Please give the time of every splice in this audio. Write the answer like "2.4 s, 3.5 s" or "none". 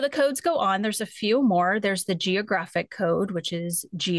none

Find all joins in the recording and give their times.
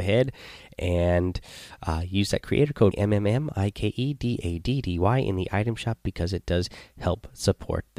2.9 s

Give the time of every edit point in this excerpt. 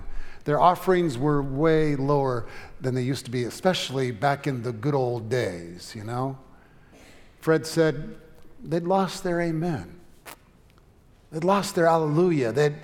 none

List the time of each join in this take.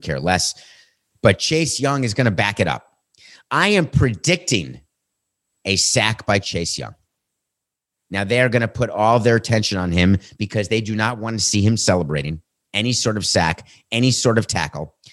none

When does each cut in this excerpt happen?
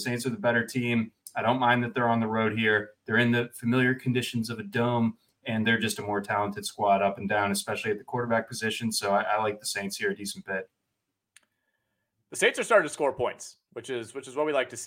none

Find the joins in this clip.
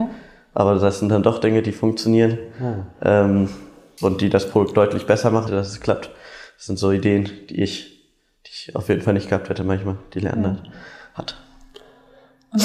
5.5 s

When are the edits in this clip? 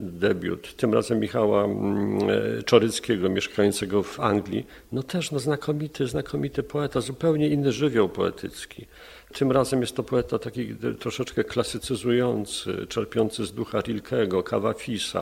none

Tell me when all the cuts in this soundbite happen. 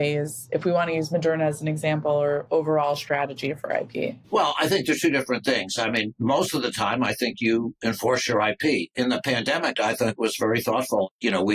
4.2 s, 9.7 s

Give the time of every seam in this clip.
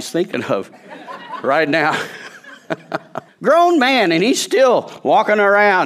3.3 s

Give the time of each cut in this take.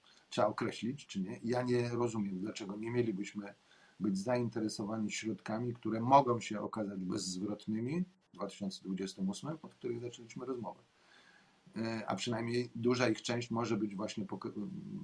1.0 s, 9.6 s

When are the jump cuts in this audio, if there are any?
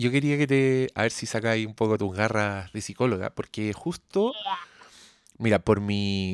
none

